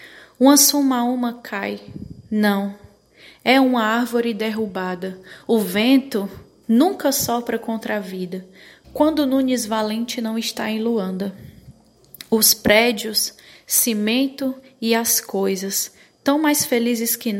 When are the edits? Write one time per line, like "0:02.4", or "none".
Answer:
0:08.8